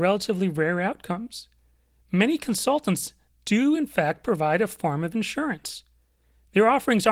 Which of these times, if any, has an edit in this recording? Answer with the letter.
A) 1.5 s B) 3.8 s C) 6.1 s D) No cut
D